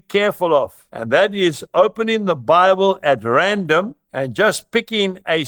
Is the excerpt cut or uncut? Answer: uncut